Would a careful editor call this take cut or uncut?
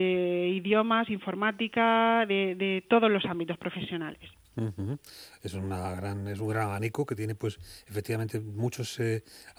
uncut